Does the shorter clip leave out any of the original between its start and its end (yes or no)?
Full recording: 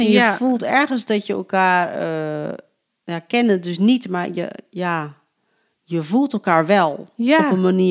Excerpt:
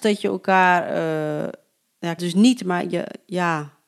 yes